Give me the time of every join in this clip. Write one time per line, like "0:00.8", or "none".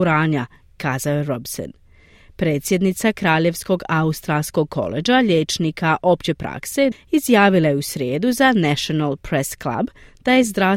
0:06.9